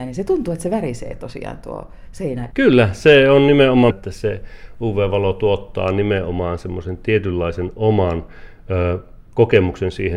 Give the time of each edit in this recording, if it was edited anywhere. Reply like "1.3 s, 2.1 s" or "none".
2.5 s, 3.9 s